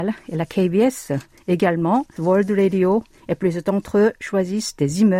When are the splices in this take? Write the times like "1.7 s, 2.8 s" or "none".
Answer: 2.2 s